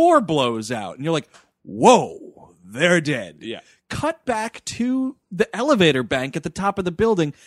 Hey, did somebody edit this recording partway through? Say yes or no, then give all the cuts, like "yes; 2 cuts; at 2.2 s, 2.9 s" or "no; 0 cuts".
no; 0 cuts